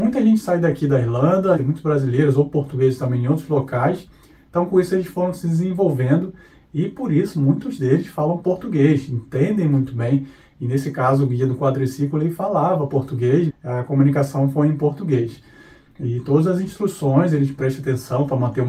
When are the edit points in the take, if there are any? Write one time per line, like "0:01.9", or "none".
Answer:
0:01.6
0:13.5
0:17.6

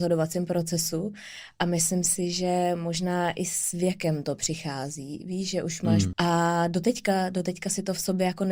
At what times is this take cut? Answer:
0:06.1

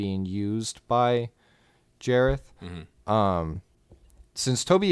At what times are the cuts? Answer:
none

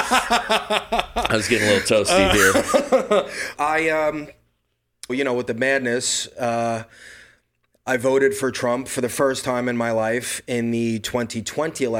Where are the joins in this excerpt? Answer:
0:03.6
0:05.1

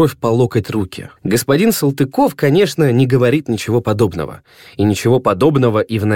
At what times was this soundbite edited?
0:01.2

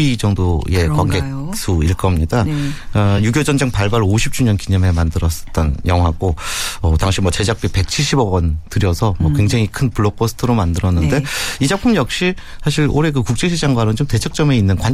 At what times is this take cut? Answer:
none

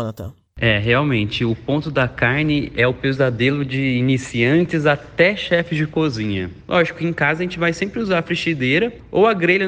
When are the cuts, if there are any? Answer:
0:06.6

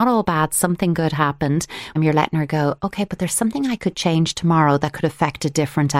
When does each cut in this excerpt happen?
0:02.0

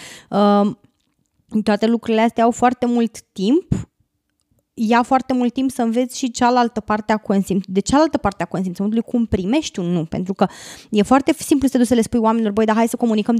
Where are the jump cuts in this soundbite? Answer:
none

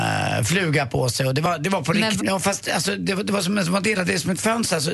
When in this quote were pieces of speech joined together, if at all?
0:02.2

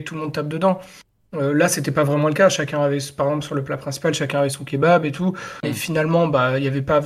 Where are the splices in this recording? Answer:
0:05.6

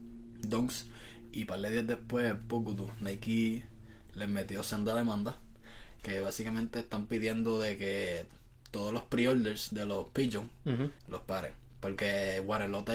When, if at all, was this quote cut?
0:06.0
0:11.0

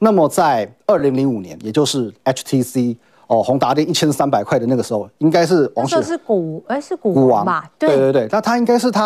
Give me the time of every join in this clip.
none

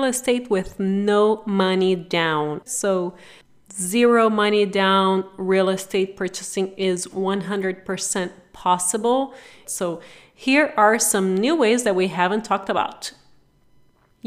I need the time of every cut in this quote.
0:02.7
0:09.6

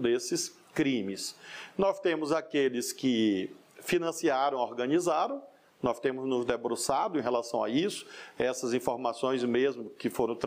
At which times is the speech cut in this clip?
none

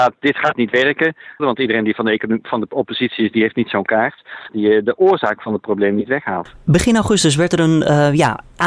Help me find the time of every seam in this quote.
0:01.4
0:04.5

